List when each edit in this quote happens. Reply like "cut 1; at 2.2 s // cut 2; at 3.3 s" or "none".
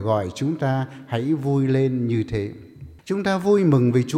cut 1; at 3.0 s